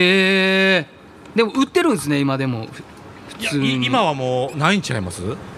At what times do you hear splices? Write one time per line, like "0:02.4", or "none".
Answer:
0:04.5